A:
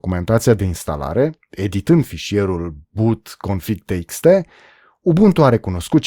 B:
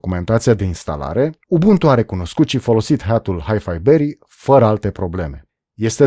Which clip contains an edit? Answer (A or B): B